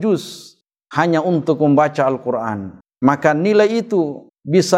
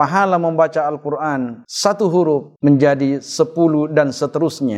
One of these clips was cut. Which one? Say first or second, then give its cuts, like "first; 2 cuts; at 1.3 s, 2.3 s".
first; 1 cut; at 2.9 s